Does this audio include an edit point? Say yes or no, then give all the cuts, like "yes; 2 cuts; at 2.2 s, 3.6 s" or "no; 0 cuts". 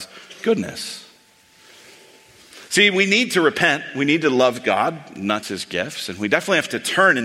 yes; 1 cut; at 5.4 s